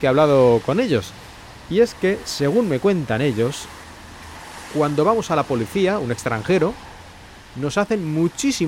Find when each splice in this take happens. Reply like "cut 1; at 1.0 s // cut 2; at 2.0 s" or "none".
none